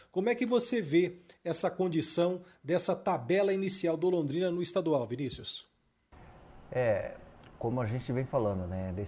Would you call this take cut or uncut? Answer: uncut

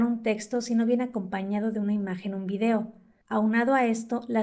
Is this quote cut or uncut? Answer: uncut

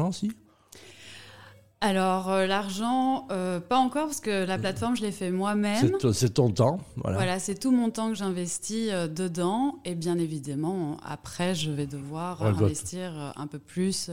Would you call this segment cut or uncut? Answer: uncut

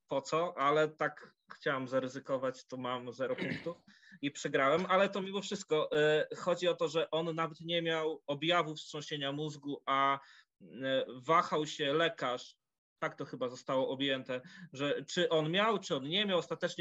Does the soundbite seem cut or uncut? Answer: uncut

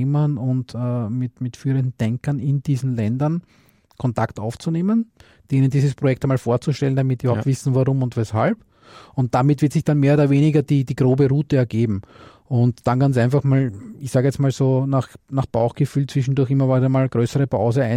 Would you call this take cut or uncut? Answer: uncut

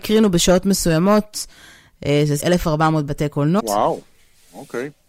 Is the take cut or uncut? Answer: cut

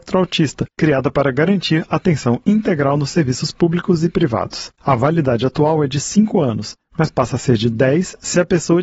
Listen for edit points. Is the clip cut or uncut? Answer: uncut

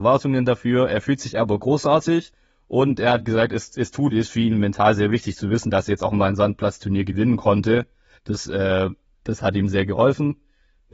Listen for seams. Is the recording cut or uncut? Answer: uncut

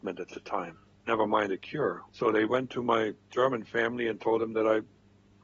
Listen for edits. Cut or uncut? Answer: cut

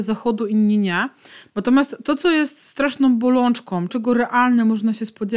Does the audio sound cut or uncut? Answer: cut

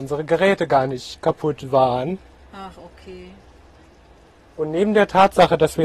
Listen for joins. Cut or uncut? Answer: uncut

